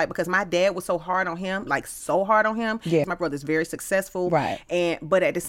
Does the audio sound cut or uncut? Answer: cut